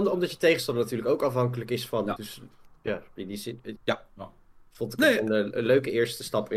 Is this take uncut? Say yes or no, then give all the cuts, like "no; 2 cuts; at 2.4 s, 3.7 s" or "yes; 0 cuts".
no; 2 cuts; at 2.2 s, 3.8 s